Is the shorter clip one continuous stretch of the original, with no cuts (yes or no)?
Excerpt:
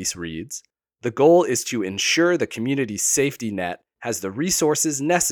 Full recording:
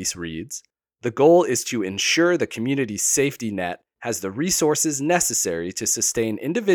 yes